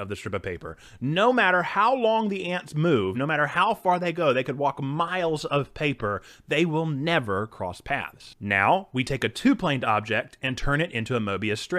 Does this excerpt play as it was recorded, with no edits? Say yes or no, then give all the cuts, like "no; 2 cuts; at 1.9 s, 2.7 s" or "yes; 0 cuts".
yes; 0 cuts